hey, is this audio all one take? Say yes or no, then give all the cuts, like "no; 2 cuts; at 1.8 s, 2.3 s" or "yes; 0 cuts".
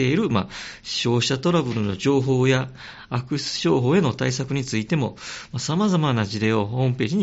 yes; 0 cuts